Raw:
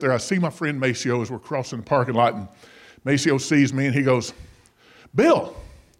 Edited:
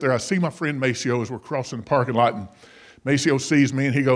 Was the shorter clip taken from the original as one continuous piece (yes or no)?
yes